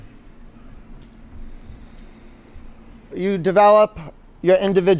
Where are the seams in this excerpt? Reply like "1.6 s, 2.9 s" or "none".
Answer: 3.1 s